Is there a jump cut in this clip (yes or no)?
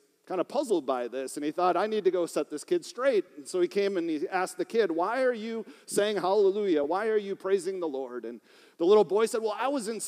no